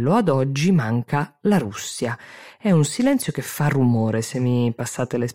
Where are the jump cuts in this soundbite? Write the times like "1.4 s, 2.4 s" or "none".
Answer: none